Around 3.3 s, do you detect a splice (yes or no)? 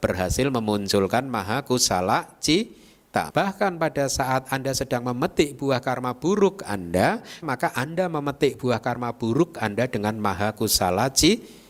yes